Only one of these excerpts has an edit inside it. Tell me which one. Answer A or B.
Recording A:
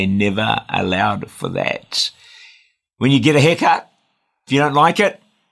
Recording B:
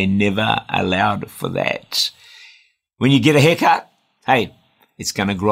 B